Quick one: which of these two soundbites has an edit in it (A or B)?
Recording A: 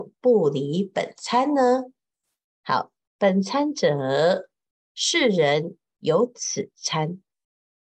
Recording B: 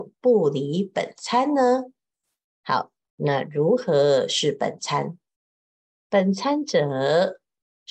A